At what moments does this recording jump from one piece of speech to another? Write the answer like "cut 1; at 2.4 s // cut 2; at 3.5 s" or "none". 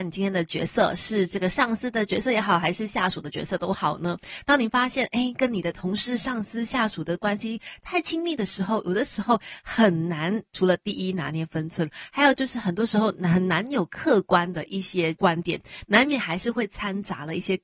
none